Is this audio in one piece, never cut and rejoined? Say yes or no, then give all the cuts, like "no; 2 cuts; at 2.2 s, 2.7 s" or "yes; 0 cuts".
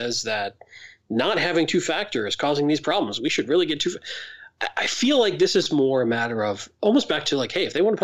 yes; 0 cuts